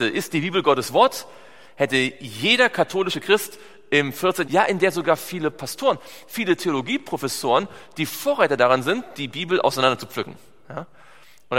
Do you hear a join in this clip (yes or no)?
yes